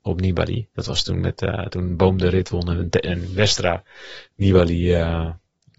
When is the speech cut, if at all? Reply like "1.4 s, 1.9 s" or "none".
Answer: none